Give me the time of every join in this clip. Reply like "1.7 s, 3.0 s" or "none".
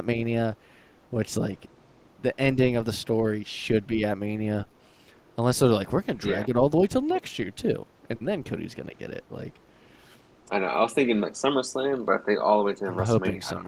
11.2 s